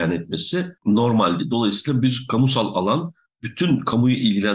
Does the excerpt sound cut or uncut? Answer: uncut